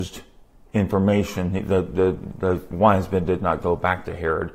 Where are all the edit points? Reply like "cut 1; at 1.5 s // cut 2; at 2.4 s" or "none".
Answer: none